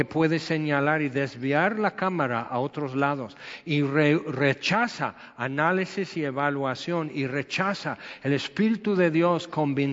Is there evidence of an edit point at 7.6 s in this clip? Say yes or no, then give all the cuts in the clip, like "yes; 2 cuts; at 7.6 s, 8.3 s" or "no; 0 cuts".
no; 0 cuts